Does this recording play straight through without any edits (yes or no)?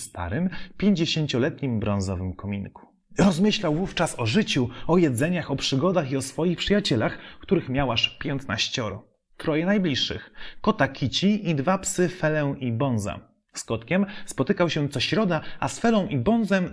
yes